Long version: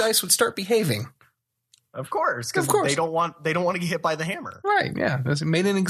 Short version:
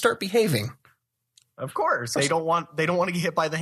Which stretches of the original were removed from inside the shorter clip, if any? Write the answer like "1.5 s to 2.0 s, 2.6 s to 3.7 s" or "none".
2.5 s to 2.8 s